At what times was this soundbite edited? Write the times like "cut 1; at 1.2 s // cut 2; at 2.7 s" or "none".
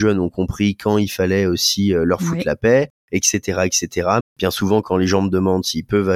cut 1; at 4.2 s